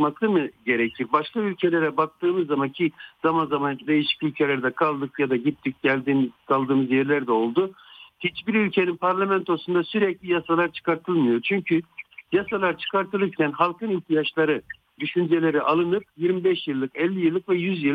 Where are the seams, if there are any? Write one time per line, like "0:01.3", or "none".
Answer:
0:15.0